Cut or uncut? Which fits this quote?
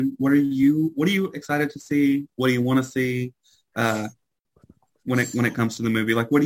uncut